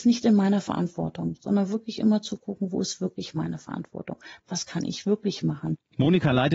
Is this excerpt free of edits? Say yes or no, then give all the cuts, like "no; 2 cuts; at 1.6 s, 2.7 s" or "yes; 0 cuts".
yes; 0 cuts